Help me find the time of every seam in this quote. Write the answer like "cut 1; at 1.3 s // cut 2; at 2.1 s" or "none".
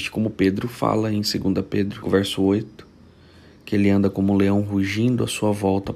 cut 1; at 2.0 s